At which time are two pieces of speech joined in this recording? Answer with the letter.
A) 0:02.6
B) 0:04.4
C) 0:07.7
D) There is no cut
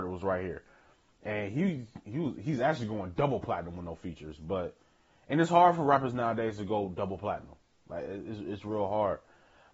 D